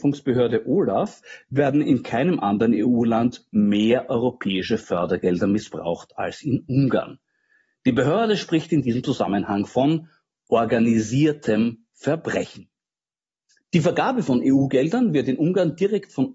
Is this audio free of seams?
yes; 0 cuts

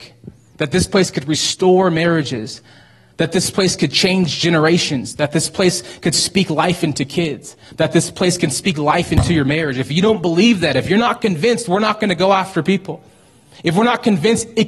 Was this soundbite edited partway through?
no; 0 cuts

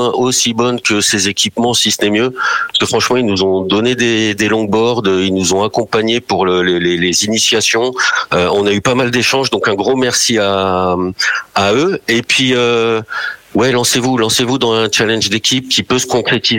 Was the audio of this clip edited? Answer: no; 0 cuts

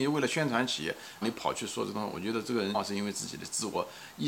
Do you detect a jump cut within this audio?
yes; 2 cuts; at 1.2 s, 2.7 s

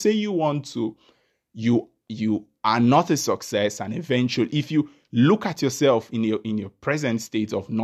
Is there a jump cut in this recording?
no; 0 cuts

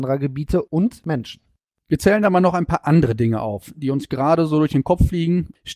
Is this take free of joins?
yes; 0 cuts

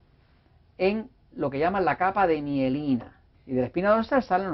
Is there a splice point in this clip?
yes; 1 cut; at 3.3 s

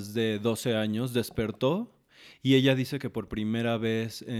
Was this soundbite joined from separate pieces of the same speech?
no; 0 cuts

